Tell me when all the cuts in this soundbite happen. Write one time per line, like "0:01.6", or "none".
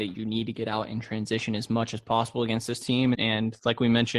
0:03.1